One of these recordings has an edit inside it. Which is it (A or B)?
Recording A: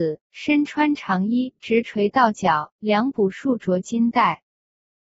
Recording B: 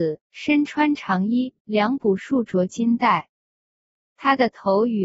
B